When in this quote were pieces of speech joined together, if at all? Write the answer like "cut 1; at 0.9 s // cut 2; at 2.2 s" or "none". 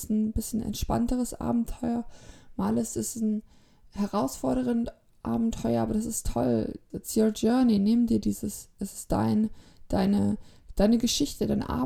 cut 1; at 6.9 s

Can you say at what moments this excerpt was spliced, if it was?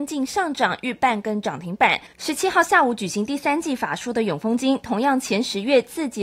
cut 1; at 2.1 s

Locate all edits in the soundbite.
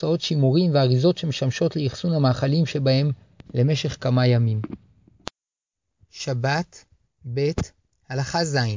none

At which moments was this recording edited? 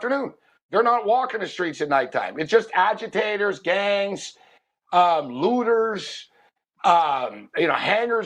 none

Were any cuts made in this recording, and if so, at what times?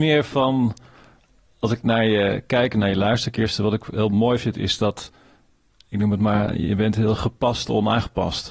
none

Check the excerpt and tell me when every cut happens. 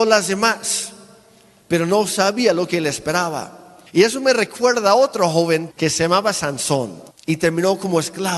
cut 1; at 3.9 s // cut 2; at 5.7 s // cut 3; at 7.1 s

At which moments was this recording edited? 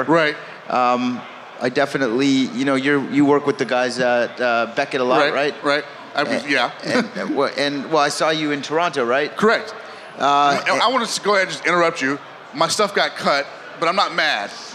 none

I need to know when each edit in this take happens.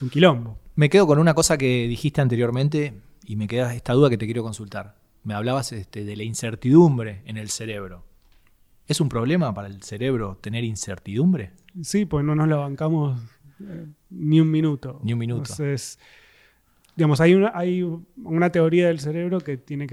none

